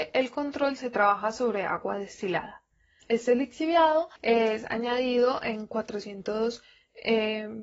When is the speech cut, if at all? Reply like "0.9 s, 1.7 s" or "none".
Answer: 3.0 s, 4.2 s